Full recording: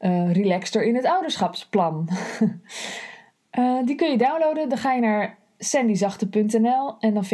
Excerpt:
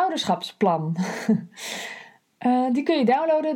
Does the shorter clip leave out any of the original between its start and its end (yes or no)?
no